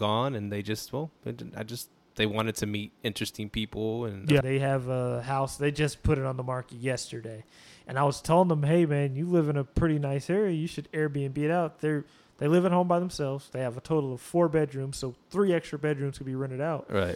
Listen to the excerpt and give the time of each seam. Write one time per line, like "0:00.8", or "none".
0:04.4